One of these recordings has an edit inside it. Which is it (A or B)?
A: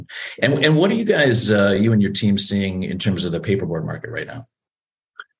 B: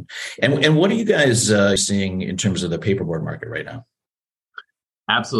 B